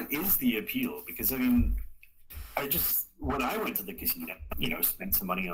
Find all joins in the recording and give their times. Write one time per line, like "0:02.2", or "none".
0:04.5

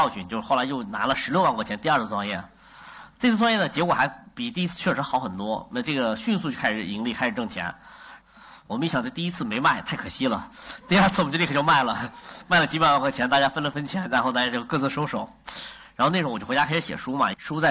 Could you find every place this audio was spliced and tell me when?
0:08.2

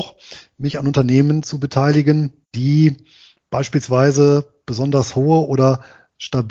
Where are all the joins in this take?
0:02.4

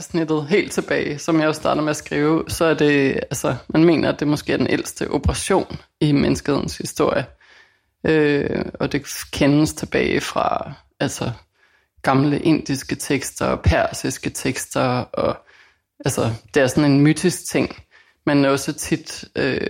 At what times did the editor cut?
none

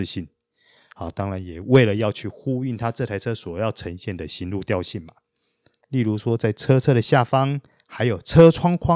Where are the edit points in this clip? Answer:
0:05.8

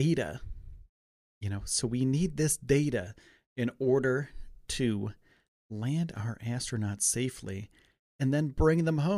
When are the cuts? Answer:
none

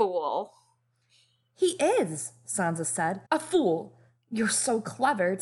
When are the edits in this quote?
0:03.3

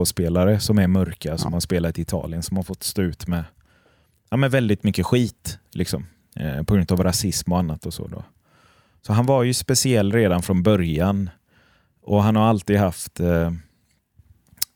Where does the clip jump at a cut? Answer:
none

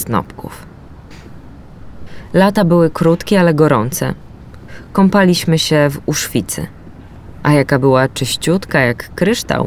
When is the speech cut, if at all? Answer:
none

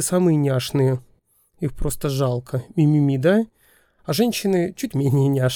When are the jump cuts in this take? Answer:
none

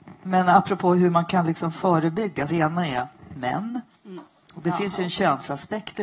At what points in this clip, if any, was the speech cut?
0:02.5

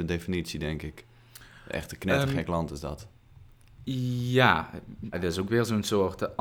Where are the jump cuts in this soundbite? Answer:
0:05.1

